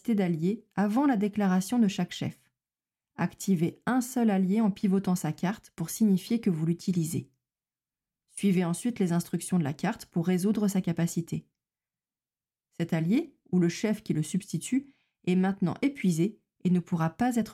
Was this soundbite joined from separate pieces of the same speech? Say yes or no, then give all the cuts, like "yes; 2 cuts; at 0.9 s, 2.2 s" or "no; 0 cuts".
no; 0 cuts